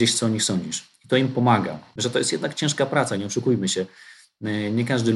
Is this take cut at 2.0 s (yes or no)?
yes